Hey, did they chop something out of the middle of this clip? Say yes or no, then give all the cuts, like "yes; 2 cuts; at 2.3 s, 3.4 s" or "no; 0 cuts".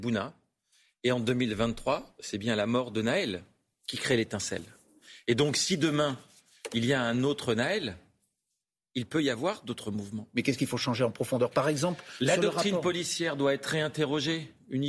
no; 0 cuts